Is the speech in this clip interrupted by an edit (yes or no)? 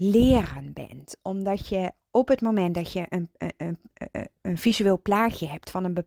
no